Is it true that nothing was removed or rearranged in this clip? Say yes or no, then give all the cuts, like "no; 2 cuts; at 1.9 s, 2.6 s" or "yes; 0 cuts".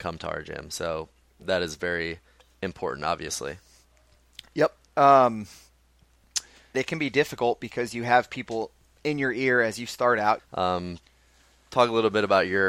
no; 2 cuts; at 6.7 s, 10.4 s